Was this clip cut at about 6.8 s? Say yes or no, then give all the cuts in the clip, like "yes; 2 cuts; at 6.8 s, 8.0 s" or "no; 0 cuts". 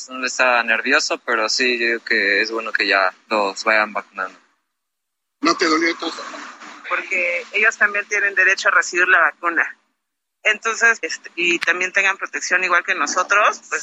yes; 2 cuts; at 6.8 s, 11.0 s